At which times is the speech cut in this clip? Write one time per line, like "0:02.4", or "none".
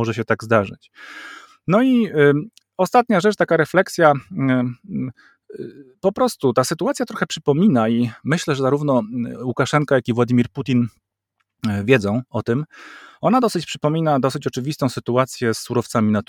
none